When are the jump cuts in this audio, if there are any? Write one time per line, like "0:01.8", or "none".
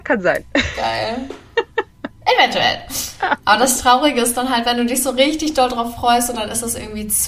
none